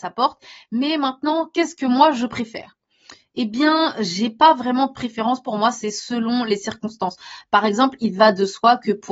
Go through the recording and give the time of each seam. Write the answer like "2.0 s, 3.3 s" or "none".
none